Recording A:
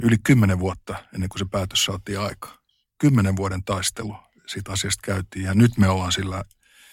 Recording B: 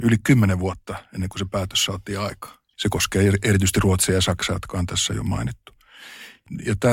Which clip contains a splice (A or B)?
B